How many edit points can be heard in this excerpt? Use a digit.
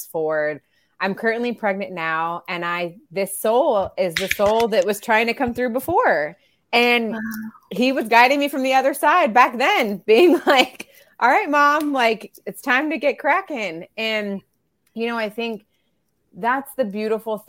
0